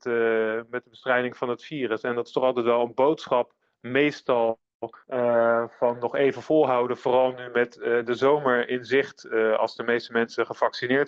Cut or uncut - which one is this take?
uncut